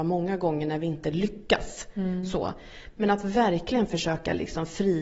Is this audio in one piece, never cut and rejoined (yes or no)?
yes